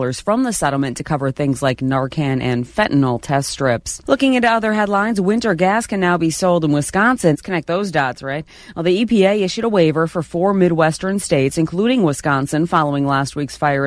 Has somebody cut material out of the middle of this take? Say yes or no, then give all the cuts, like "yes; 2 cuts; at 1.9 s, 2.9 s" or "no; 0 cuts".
yes; 1 cut; at 7.3 s